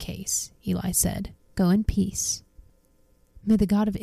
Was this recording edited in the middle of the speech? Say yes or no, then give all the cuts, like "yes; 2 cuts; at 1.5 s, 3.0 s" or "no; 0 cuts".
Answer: no; 0 cuts